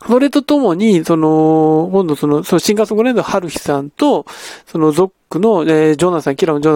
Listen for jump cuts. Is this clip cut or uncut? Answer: uncut